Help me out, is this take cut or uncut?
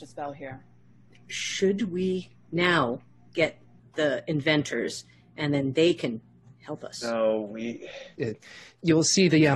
cut